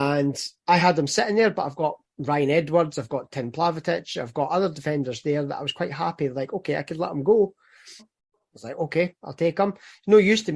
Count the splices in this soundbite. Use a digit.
1